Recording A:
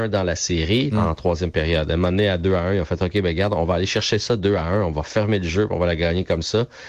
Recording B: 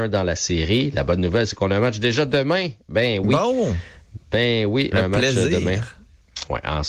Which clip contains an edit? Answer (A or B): A